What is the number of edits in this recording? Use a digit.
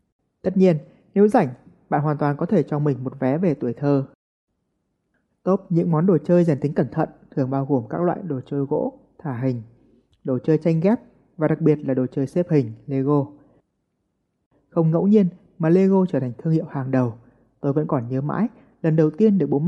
0